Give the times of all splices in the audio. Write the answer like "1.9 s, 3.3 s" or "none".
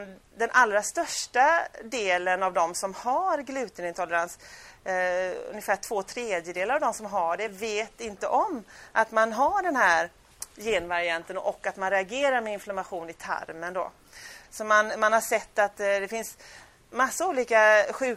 14.4 s

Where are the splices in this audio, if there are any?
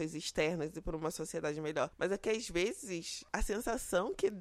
none

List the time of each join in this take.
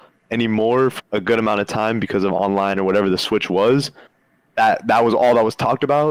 1.0 s

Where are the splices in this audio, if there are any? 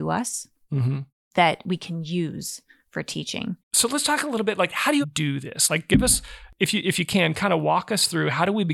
3.6 s, 5.0 s

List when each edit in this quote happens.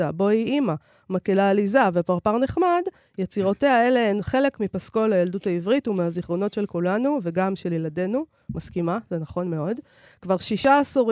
none

